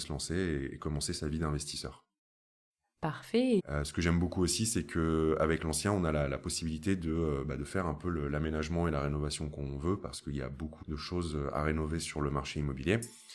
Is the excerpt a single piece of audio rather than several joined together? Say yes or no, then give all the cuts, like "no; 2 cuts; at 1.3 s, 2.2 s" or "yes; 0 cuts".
no; 2 cuts; at 3.6 s, 10.8 s